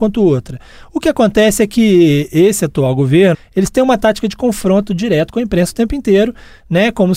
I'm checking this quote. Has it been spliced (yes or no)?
yes